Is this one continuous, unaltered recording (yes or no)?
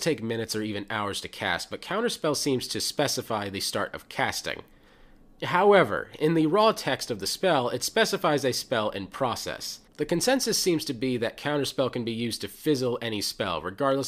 yes